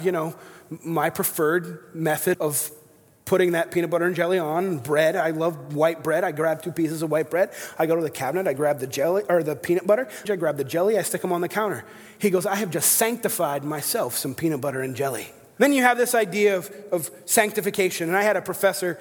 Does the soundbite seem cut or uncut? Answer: cut